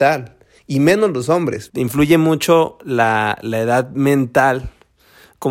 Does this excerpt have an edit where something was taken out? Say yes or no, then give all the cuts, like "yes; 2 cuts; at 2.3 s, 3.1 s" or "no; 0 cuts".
yes; 1 cut; at 1.7 s